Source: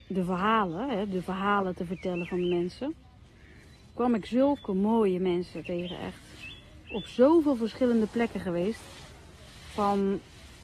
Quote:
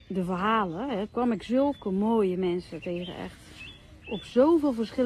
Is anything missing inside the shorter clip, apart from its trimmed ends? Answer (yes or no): yes